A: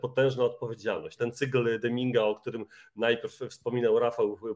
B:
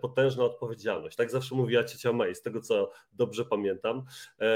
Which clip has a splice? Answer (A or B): A